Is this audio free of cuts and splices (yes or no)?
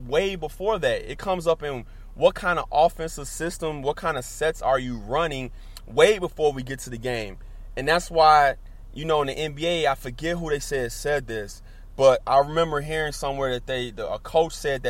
yes